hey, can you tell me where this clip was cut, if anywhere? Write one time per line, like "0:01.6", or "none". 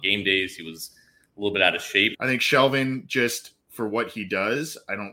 0:02.1